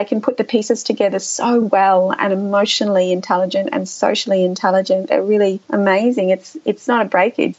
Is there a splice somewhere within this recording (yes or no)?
no